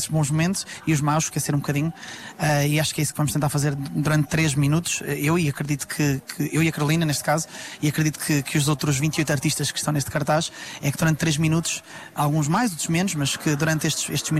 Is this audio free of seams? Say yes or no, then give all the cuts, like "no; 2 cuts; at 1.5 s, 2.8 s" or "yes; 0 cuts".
yes; 0 cuts